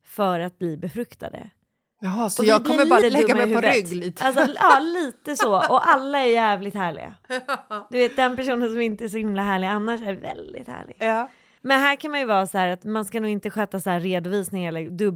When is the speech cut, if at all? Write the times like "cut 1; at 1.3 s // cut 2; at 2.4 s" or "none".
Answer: cut 1; at 3.0 s // cut 2; at 11.6 s